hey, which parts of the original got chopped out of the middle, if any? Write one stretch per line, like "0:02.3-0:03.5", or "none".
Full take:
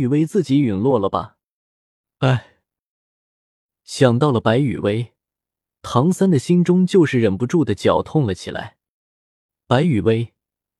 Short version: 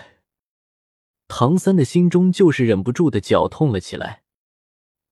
0:03.5-0:05.7